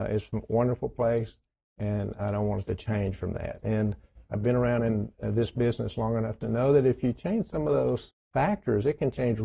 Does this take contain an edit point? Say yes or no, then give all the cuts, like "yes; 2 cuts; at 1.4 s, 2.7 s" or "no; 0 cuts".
no; 0 cuts